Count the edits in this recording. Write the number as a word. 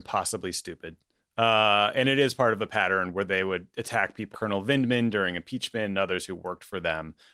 one